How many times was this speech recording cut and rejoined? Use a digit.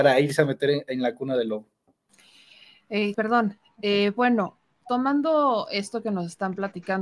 1